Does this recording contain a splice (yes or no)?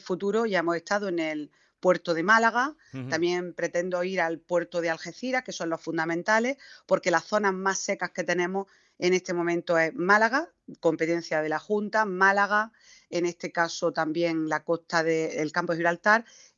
no